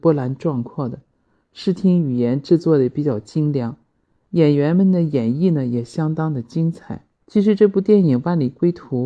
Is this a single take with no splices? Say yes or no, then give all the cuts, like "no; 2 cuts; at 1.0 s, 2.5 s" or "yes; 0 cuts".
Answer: no; 1 cut; at 7.2 s